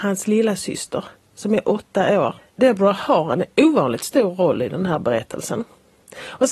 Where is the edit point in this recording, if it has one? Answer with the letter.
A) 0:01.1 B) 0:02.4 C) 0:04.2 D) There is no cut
B